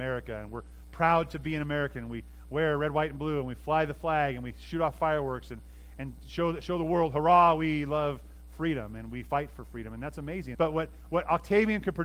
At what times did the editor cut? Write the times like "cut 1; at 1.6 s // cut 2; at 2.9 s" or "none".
cut 1; at 10.5 s